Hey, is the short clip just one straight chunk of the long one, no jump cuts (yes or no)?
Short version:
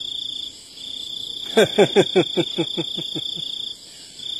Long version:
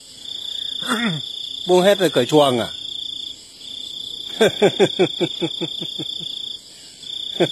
yes